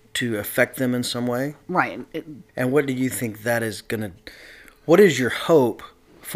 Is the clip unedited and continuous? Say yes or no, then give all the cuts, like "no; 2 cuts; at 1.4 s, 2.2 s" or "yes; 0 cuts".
no; 1 cut; at 2.5 s